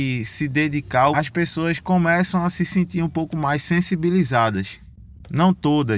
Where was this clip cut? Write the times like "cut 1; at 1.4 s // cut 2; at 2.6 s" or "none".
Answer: cut 1; at 1.1 s